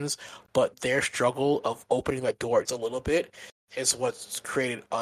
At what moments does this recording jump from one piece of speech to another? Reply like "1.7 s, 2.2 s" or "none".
2.7 s